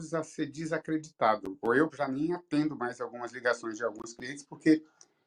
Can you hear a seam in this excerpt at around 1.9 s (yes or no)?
yes